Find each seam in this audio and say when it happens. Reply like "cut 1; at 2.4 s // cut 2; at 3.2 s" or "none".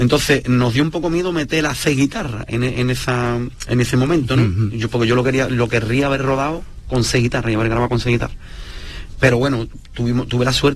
none